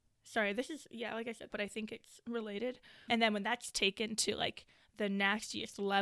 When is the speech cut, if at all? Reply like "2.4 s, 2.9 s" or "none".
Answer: 1.5 s, 3.1 s